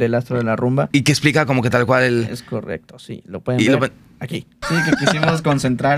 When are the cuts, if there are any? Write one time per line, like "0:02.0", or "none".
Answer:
0:00.9
0:04.6